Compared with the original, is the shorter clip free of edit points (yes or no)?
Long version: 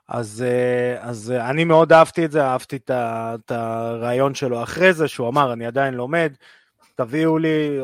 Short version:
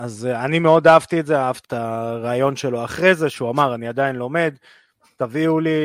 no